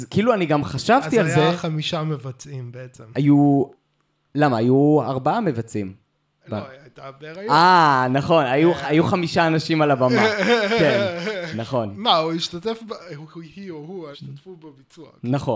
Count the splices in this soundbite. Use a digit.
2